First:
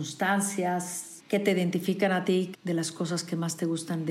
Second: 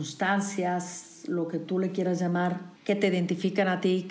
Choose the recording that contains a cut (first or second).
first